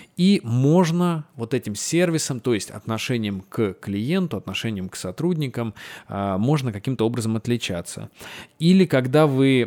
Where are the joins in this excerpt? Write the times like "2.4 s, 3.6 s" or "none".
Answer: none